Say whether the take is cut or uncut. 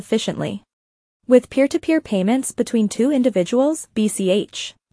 cut